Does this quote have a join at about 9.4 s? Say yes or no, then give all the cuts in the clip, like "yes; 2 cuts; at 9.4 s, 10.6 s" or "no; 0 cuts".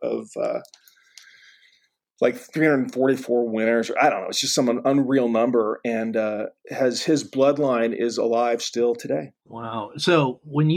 yes; 1 cut; at 9.4 s